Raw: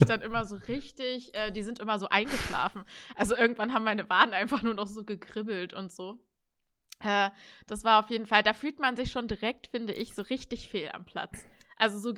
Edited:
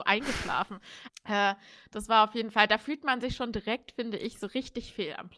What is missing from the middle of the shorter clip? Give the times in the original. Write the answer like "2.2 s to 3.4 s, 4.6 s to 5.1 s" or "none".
3.1 s to 6.8 s

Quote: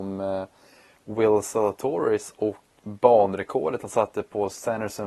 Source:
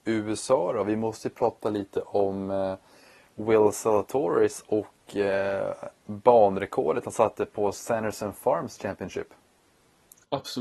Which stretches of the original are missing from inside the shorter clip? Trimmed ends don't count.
5.1 s to 6.0 s

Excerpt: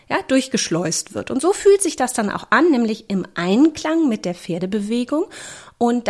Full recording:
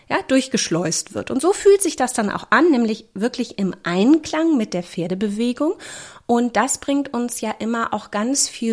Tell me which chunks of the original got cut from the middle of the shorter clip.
3.1 s to 3.6 s

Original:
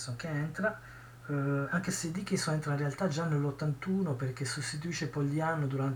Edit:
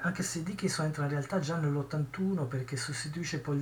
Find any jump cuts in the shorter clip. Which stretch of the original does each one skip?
none

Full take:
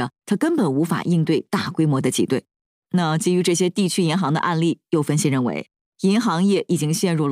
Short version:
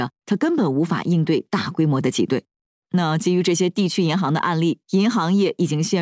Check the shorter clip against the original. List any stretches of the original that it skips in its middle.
4.8 s to 5.9 s

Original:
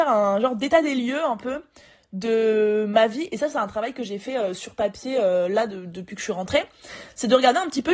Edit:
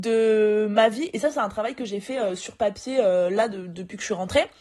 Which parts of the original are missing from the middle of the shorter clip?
none

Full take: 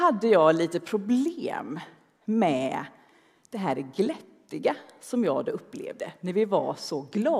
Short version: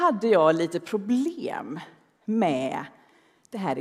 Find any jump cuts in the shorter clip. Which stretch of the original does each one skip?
none

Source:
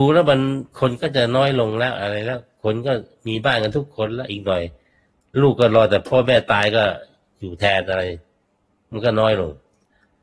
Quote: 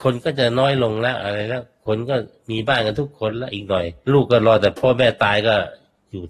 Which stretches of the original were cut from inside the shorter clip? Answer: 4.8 s to 5.3 s

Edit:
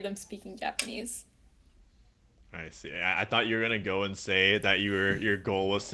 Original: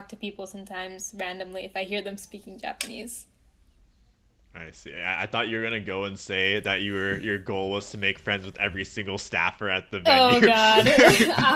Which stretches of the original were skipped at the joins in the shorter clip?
none

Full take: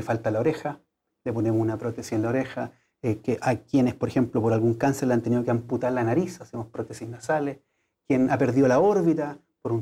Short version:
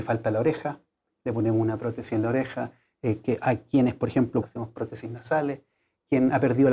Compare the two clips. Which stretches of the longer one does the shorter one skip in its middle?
4.4 s to 6.4 s

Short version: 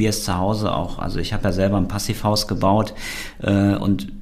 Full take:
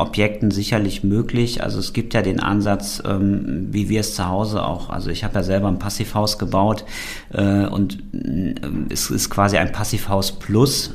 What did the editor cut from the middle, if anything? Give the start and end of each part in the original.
none

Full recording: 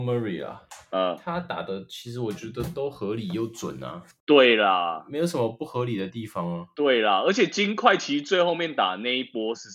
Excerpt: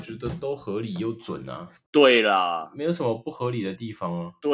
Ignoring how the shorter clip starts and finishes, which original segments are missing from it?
none

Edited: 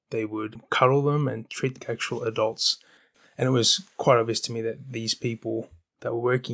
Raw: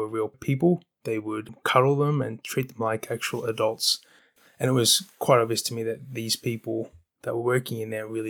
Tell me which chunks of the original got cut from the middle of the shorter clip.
2.7 s to 3.0 s

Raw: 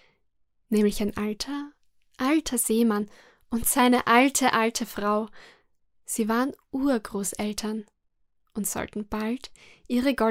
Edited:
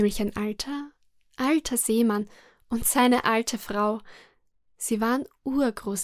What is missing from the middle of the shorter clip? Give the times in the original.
4.0 s to 4.5 s

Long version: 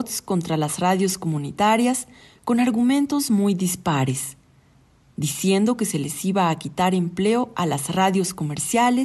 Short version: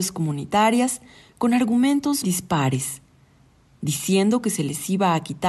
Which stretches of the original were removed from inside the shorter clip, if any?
3.3 s to 3.6 s

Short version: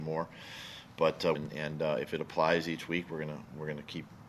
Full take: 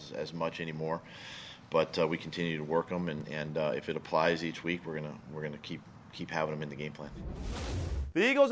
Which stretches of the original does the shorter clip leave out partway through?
2.1 s to 3.1 s

